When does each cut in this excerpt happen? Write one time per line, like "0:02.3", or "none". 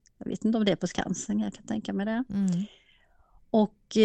none